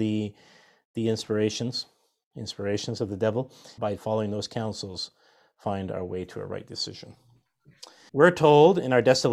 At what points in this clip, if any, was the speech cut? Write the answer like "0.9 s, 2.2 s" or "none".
3.8 s, 8.1 s